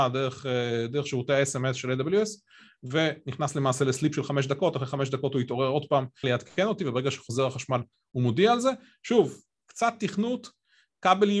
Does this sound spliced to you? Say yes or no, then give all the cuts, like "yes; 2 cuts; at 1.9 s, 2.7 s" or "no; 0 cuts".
yes; 2 cuts; at 6.2 s, 9.6 s